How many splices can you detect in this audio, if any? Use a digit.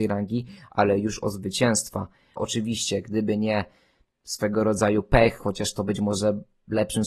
1